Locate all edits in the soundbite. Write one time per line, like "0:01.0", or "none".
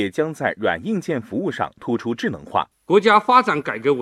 0:02.7